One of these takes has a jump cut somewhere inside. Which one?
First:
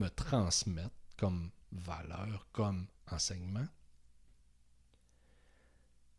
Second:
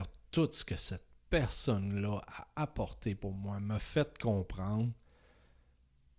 first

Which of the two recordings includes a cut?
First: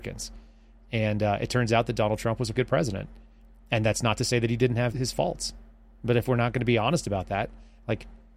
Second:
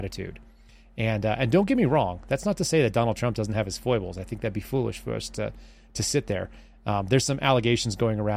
first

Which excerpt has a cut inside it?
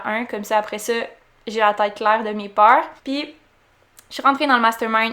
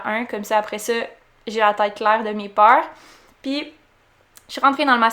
first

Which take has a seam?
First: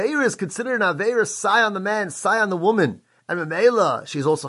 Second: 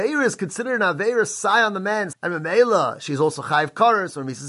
second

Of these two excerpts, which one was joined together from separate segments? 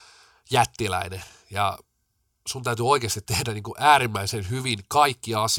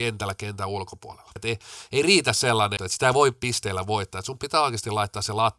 second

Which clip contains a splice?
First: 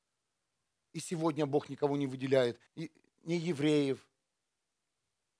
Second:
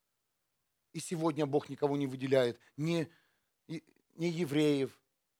first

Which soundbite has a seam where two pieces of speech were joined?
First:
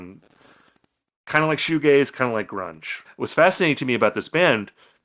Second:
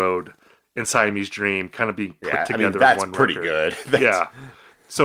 first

